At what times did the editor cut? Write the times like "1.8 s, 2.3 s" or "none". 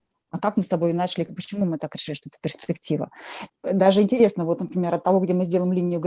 none